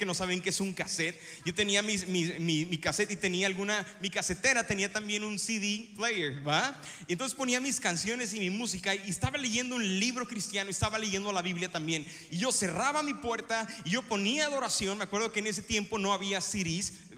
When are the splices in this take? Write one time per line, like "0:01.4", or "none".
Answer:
0:12.3